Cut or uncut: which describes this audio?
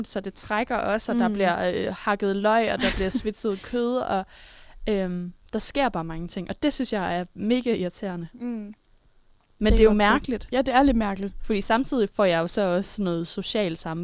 uncut